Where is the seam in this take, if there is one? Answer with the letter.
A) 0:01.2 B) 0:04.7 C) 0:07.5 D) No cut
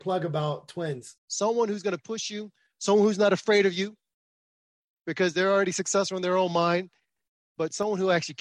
A